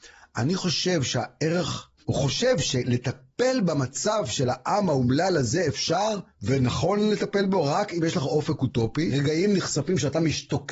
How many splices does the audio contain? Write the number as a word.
two